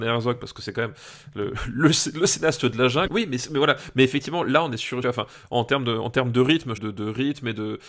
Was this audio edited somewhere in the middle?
yes; 3 cuts; at 3.1 s, 5.0 s, 6.8 s

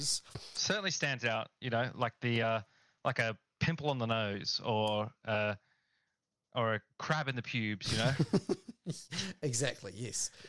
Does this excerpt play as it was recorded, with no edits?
yes; 0 cuts

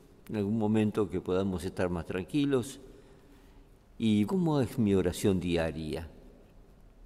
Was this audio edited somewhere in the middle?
yes; 1 cut; at 4.3 s

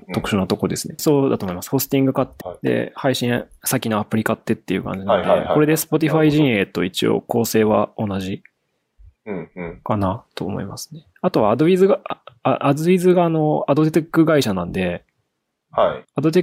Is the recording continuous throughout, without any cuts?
no; 2 cuts; at 1.0 s, 2.4 s

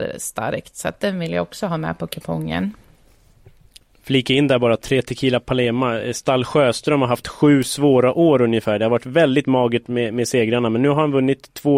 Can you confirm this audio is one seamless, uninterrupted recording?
yes; 0 cuts

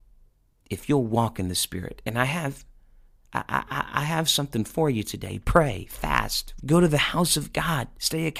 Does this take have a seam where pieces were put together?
yes; 1 cut; at 6.6 s

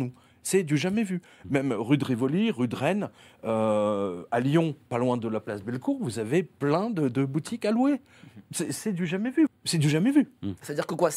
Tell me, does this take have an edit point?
yes; 2 cuts; at 4.9 s, 9.5 s

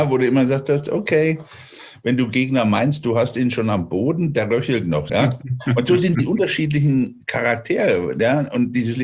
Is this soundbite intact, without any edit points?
no; 1 cut; at 5.1 s

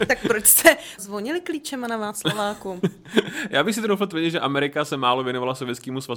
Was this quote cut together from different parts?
yes; 1 cut; at 1.0 s

